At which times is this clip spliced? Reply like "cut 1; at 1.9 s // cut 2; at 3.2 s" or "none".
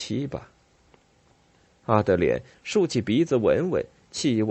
cut 1; at 2.5 s